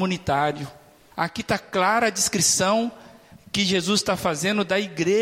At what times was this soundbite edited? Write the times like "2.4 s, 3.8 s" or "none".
1.1 s

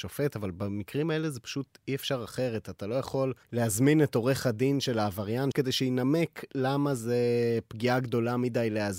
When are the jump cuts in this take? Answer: 3.4 s, 5.5 s

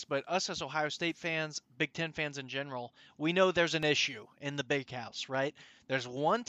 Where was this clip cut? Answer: none

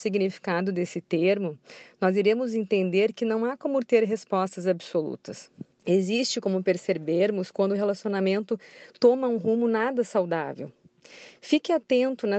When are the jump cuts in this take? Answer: 5.8 s

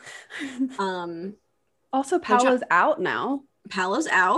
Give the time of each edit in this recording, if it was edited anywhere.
none

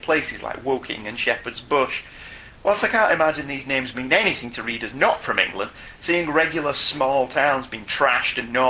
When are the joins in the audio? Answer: none

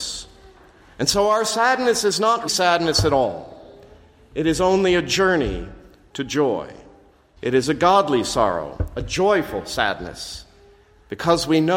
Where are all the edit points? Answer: 2.5 s, 7.4 s

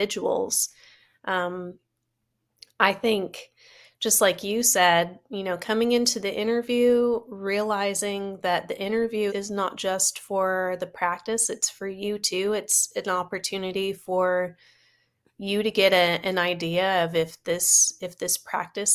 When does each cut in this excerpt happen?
9.3 s

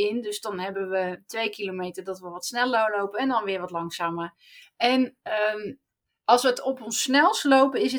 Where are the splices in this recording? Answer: 4.6 s

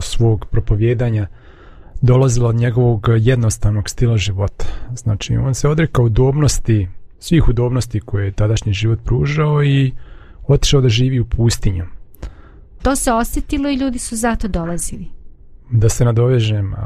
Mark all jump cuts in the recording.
7.1 s, 12.8 s

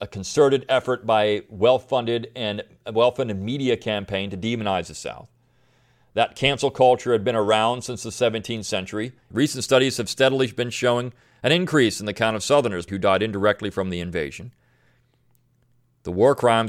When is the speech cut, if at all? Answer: 9.3 s, 12.9 s

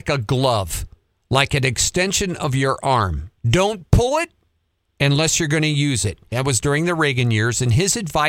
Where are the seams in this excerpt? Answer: 3.4 s, 6.3 s

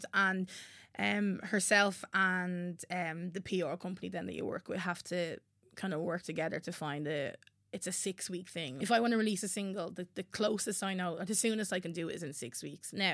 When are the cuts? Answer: 8.8 s

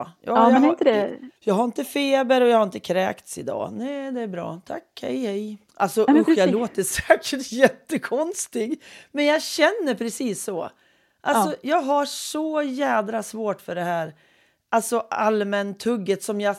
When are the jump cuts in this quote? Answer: 1.4 s

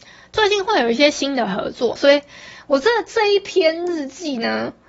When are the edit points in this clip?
2.0 s

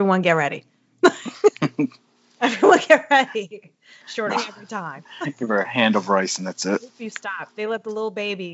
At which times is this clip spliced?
4.3 s

